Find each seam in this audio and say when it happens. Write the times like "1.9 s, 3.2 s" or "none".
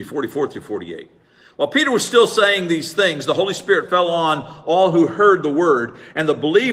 none

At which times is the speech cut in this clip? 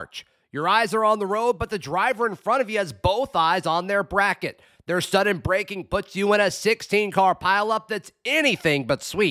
none

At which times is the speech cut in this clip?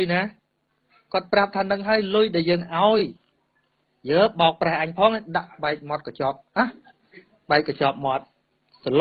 none

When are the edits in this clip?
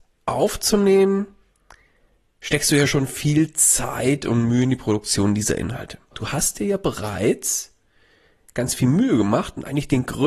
6.1 s

